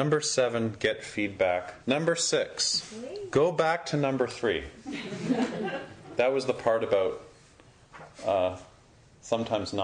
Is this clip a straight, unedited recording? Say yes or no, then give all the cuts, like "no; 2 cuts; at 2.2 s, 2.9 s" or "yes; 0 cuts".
no; 1 cut; at 1.8 s